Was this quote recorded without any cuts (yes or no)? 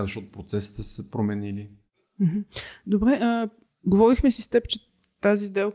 yes